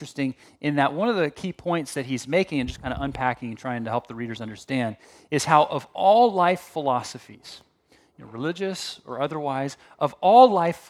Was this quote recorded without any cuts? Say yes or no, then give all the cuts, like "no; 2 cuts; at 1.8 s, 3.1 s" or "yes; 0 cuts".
yes; 0 cuts